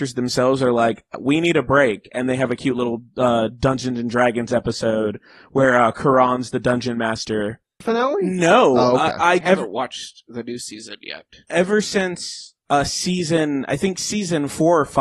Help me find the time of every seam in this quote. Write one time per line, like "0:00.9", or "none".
0:07.8
0:09.4